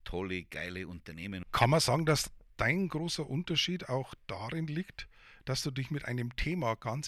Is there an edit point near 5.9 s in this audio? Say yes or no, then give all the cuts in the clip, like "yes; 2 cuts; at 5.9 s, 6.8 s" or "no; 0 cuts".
no; 1 cut; at 1.4 s